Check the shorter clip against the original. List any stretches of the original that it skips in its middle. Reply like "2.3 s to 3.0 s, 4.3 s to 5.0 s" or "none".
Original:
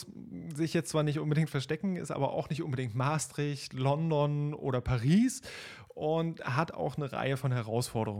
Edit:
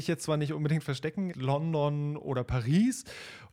2.0 s to 3.7 s